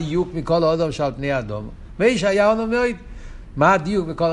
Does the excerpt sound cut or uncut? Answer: uncut